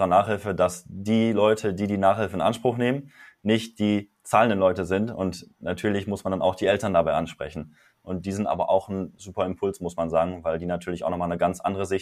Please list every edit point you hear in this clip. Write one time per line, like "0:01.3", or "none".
none

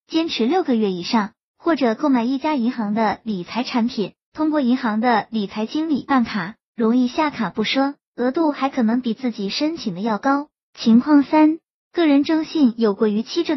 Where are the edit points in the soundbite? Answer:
none

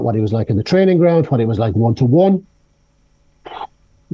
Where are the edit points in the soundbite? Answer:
none

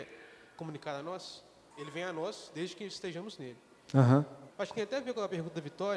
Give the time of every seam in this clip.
0:01.7
0:04.5

